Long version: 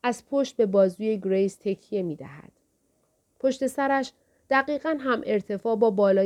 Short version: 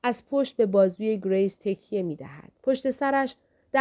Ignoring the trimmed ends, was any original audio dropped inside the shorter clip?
yes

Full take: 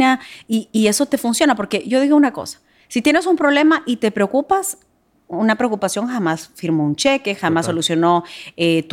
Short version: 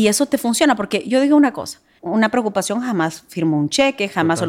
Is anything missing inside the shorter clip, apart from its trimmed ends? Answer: yes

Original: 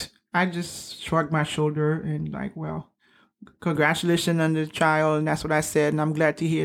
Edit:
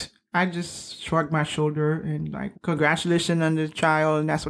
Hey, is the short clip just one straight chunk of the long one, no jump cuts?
no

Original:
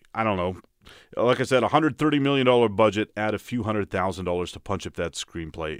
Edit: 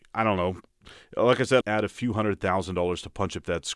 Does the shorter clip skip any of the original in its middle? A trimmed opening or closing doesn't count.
yes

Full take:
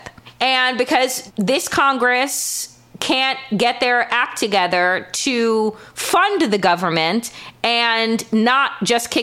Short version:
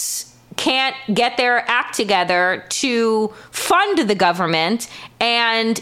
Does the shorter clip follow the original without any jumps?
yes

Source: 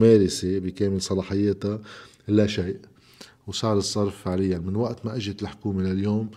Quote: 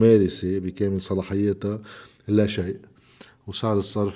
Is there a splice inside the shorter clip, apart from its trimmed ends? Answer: no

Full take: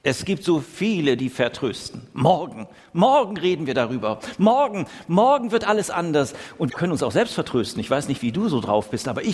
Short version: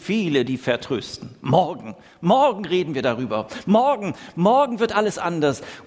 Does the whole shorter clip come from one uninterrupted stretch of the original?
yes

